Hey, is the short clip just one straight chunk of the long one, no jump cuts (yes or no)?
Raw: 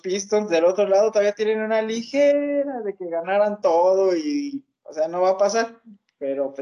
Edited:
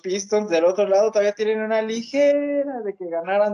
yes